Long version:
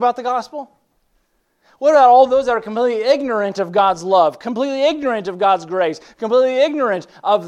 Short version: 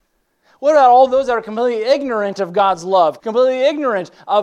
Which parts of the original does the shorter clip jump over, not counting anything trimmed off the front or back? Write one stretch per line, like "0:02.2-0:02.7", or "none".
0:04.4-0:06.1